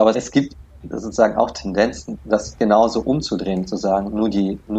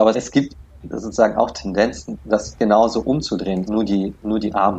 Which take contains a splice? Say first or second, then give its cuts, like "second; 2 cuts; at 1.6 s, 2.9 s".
second; 1 cut; at 3.7 s